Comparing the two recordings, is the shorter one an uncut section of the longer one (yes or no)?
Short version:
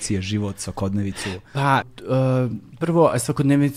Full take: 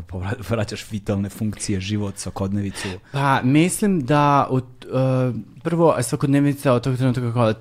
no